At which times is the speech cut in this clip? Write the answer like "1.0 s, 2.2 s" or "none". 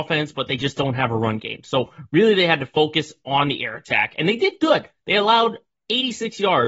none